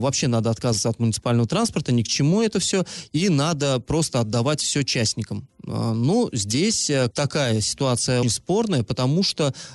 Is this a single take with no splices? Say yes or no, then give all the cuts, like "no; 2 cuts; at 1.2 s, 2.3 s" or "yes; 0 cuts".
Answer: no; 2 cuts; at 7.1 s, 8.2 s